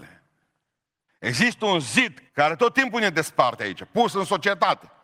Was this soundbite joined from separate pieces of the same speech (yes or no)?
yes